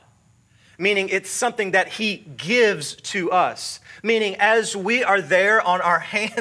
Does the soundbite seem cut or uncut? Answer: uncut